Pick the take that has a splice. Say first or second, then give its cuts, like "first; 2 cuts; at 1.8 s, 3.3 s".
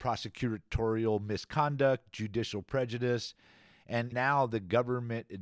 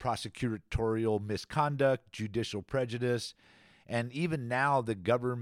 first; 1 cut; at 4.1 s